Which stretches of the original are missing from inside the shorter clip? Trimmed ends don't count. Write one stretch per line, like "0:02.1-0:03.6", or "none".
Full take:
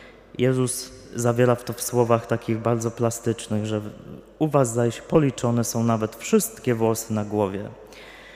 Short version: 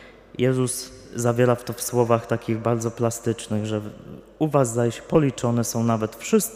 none